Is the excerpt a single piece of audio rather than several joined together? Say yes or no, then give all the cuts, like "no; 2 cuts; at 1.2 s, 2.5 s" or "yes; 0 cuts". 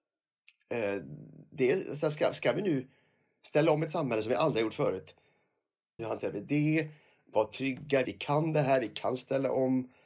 no; 2 cuts; at 6.0 s, 8.1 s